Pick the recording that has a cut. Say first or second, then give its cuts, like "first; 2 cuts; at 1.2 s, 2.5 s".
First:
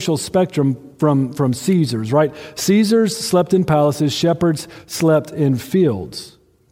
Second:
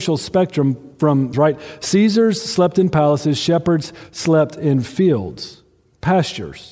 second; 1 cut; at 1.3 s